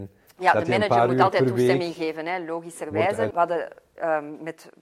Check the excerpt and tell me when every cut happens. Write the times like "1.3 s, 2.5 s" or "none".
3.3 s